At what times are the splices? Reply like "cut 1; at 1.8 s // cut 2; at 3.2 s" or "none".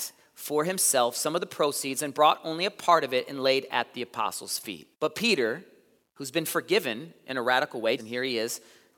cut 1; at 4.9 s // cut 2; at 8.0 s